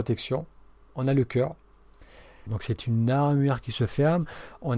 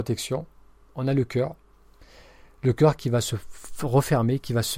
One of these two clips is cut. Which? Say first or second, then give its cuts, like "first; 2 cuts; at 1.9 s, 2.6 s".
first; 1 cut; at 2.5 s